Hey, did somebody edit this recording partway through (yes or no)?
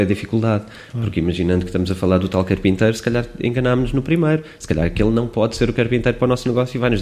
no